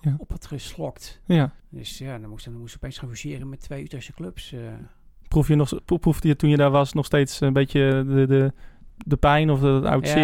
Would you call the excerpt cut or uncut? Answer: cut